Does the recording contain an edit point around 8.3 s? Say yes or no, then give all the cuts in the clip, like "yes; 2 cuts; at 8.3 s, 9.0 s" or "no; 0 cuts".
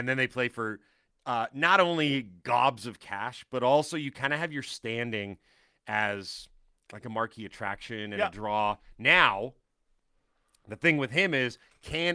no; 0 cuts